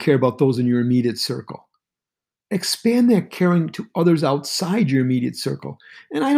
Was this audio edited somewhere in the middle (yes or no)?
no